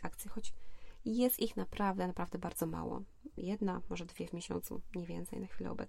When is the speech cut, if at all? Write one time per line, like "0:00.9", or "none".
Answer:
none